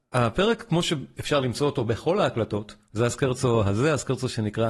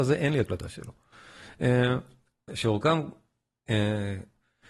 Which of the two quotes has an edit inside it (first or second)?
second